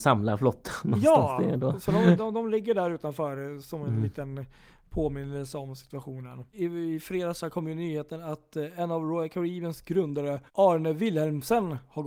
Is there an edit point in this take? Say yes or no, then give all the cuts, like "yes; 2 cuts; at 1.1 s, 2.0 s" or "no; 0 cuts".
yes; 3 cuts; at 2.2 s, 6.5 s, 10.5 s